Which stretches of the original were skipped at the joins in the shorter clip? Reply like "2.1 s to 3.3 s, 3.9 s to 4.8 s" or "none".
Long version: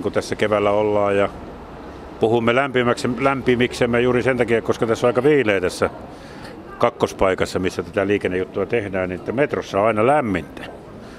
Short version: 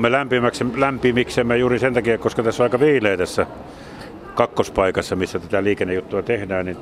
none

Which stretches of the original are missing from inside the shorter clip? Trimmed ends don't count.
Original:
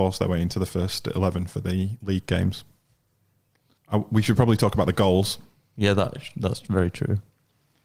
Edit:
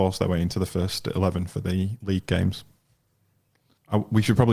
none

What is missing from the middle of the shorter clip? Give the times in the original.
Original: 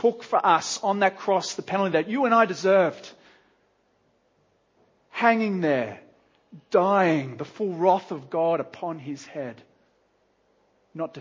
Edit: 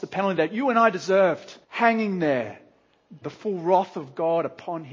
3.2 s to 5.0 s, 6.6 s to 7.4 s

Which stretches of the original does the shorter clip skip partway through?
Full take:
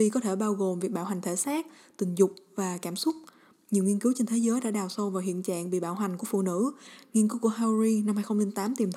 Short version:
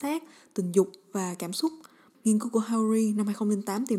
3.6 s to 7.0 s

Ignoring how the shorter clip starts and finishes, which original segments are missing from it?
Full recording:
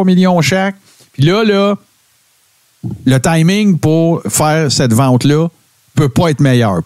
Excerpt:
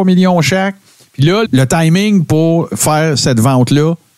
1.4 s to 3.0 s

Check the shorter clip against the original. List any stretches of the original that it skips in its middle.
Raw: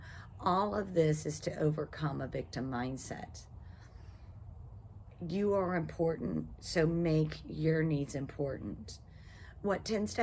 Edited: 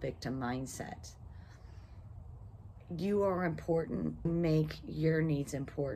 6.6 s to 6.9 s

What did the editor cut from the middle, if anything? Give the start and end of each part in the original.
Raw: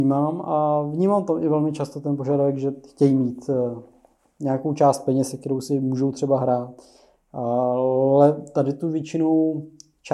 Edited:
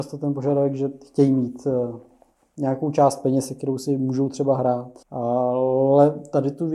6.8 s to 7.2 s

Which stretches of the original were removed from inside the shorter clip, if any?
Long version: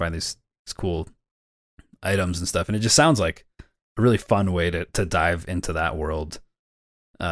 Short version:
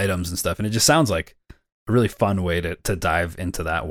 none

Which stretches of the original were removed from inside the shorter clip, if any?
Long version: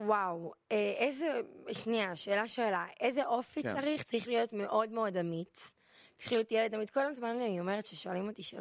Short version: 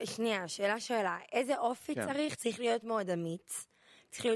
4.5 s to 4.9 s

